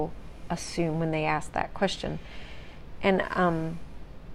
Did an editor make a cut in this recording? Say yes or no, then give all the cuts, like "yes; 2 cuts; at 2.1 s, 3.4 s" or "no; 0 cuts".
no; 0 cuts